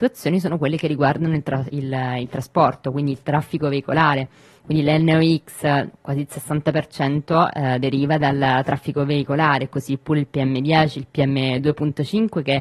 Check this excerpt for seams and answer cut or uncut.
uncut